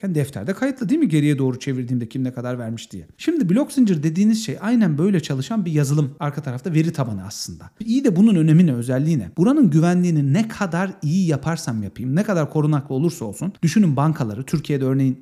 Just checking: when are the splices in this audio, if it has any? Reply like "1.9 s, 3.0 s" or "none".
9.3 s